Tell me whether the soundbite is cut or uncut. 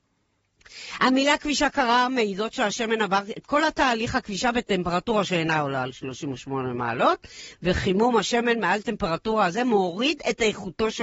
uncut